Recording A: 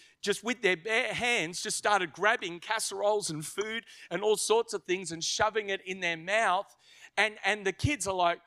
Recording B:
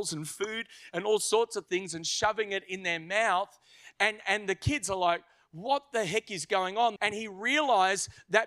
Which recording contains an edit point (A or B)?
B